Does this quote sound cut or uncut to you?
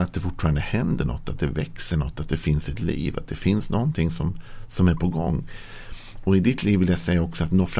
uncut